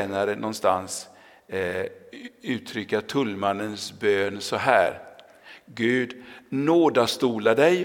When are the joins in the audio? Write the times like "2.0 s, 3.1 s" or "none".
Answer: none